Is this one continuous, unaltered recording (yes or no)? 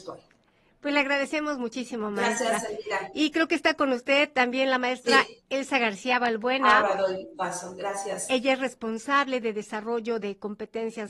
yes